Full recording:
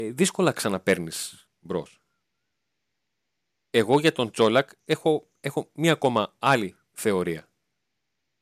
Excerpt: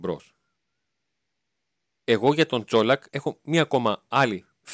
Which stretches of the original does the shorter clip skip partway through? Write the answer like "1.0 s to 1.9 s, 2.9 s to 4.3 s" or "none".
4.7 s to 5.4 s